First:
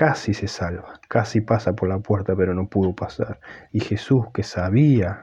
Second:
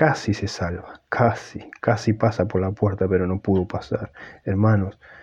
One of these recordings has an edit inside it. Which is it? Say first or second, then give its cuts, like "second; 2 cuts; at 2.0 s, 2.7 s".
first; 2 cuts; at 1.0 s, 3.7 s